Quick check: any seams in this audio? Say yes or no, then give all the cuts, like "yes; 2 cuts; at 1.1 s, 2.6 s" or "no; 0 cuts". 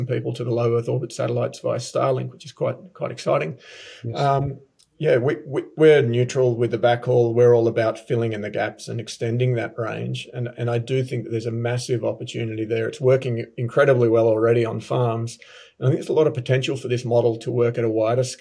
no; 0 cuts